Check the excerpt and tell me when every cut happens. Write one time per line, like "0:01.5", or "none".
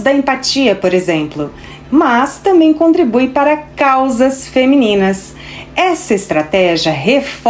0:01.8